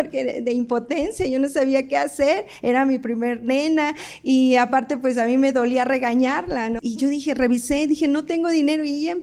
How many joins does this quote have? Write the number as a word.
one